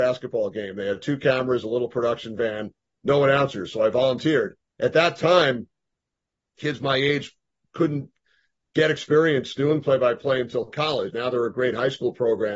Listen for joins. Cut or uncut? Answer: cut